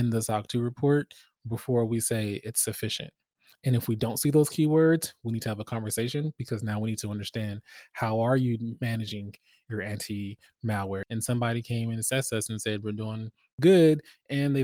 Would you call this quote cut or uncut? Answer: cut